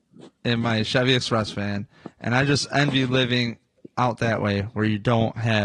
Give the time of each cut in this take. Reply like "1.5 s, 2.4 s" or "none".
none

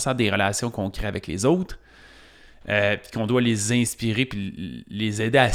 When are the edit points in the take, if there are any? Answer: none

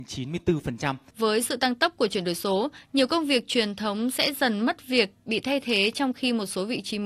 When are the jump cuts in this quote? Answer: 1.1 s

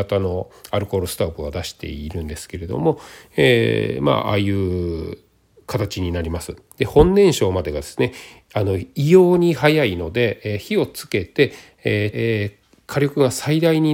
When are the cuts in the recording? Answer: 12.1 s

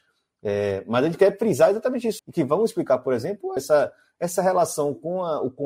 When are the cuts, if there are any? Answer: 2.2 s, 3.6 s

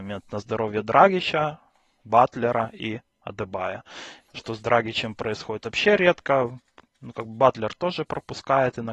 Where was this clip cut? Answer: 4.3 s

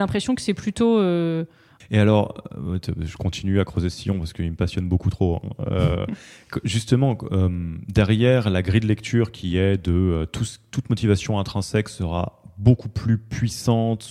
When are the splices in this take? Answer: 1.8 s

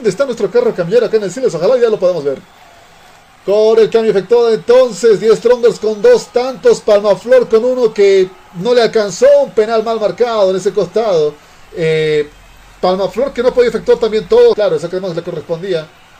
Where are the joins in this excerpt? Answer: 11.7 s, 14.5 s

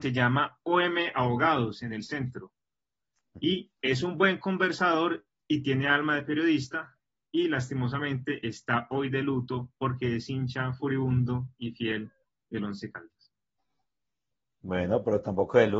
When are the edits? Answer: none

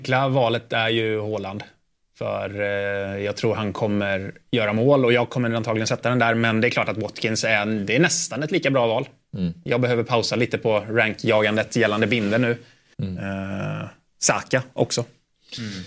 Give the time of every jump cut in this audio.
9.6 s, 12.9 s

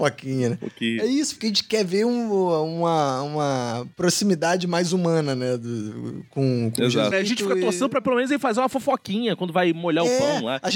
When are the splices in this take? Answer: 7.1 s

